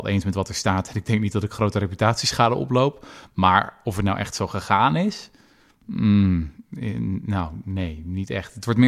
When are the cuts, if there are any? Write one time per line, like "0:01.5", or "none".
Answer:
none